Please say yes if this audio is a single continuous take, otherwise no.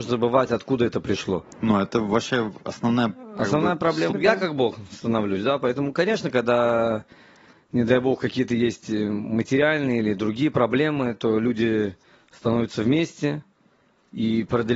no